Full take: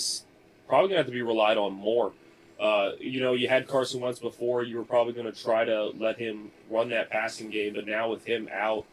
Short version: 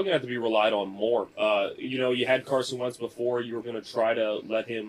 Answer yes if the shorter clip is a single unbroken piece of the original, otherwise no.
no